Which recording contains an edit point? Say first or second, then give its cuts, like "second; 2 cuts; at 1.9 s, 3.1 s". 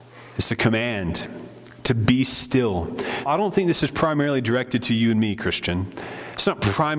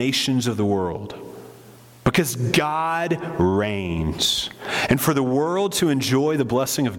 first; 1 cut; at 3.3 s